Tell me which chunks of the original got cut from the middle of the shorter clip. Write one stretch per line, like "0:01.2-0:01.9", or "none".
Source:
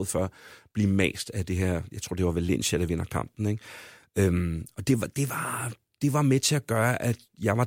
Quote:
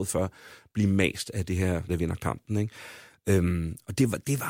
0:01.9-0:02.8